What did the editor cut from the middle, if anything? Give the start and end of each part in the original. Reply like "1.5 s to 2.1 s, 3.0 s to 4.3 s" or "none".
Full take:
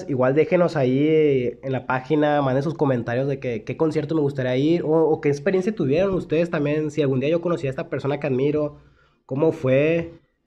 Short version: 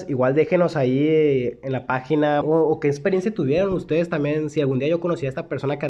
2.4 s to 4.8 s